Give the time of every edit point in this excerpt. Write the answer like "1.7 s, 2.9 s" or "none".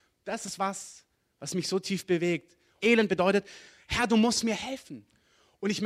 2.8 s